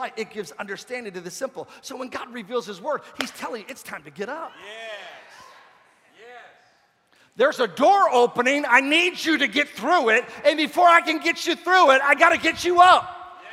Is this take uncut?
yes; 0 cuts

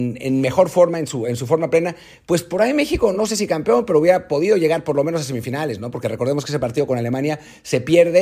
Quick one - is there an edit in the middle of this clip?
no; 0 cuts

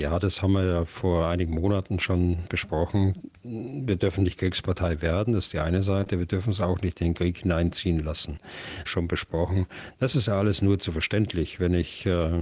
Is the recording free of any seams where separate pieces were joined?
no; 2 cuts; at 2.5 s, 8.9 s

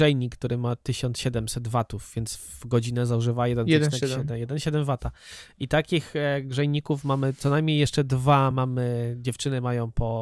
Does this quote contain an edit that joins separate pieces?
no; 0 cuts

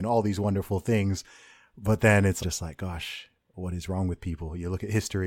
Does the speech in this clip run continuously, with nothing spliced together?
no; 1 cut; at 2.4 s

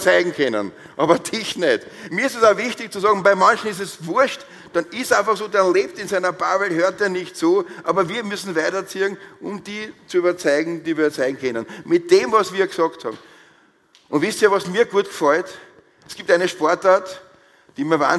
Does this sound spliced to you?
no; 0 cuts

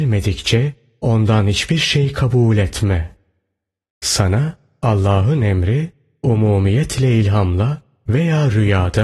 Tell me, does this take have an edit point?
no; 0 cuts

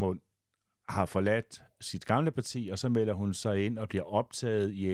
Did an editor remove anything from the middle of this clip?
no; 0 cuts

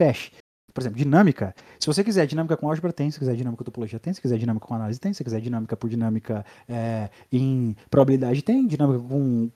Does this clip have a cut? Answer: no; 0 cuts

